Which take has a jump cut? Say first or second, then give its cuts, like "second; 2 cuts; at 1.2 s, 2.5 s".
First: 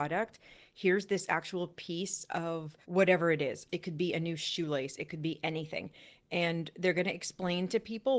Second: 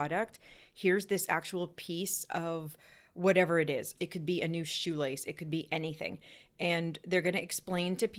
first; 1 cut; at 2.8 s